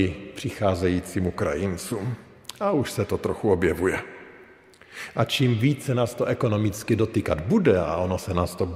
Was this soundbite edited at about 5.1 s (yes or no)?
no